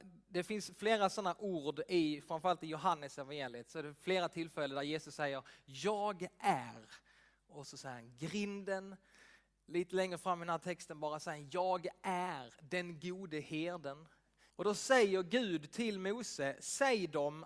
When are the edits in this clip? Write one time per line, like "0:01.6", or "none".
0:14.5